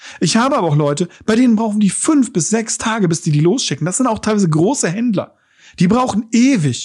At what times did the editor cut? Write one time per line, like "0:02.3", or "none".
none